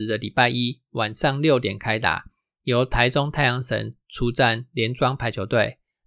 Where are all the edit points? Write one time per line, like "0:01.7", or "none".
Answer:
none